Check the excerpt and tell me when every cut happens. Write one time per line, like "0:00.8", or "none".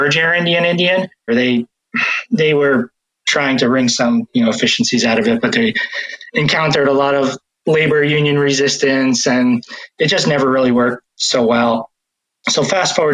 0:01.3